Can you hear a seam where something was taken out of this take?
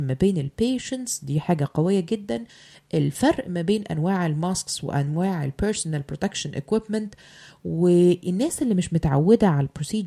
no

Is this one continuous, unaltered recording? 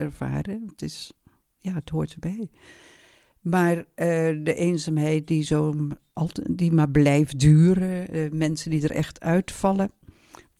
yes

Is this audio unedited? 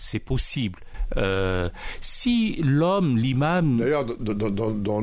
yes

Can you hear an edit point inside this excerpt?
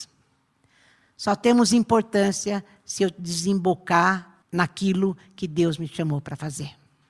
yes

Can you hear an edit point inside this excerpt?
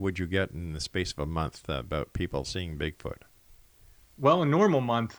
no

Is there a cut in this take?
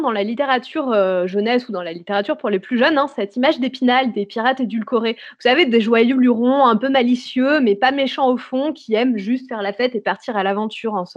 no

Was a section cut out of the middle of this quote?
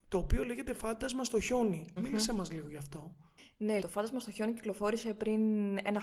yes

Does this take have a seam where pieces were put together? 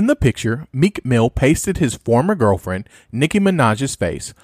no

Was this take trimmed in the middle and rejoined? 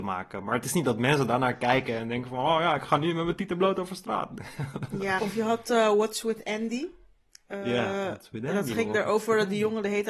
yes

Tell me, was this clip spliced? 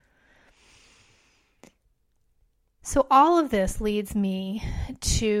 no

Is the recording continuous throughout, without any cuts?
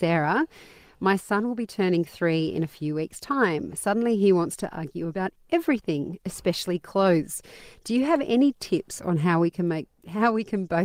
yes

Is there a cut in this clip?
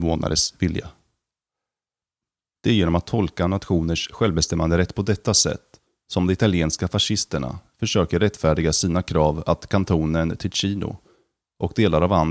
no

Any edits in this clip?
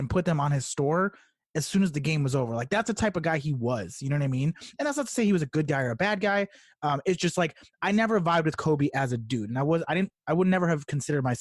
no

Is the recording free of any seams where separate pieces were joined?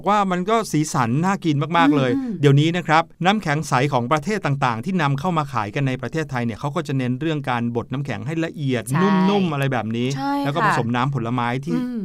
yes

